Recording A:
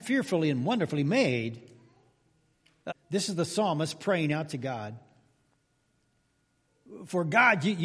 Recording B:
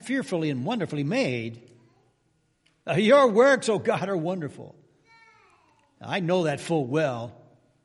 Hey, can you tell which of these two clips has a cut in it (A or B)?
A